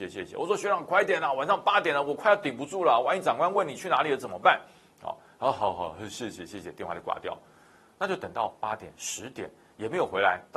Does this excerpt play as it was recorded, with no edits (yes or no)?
yes